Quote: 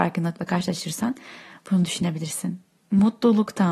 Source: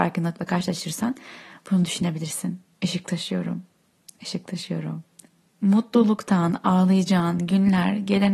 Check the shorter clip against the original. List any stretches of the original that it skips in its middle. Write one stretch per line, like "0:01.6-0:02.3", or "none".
0:02.7-0:05.4